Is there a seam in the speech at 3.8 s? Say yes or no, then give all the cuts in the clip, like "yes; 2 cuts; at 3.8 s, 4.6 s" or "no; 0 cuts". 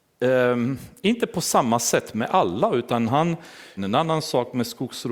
yes; 1 cut; at 3.8 s